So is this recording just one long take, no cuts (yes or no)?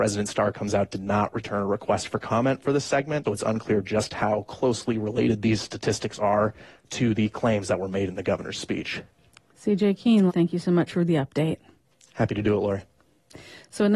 no